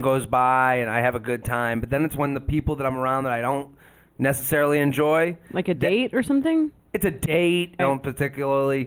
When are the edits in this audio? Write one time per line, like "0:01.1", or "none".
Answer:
0:07.8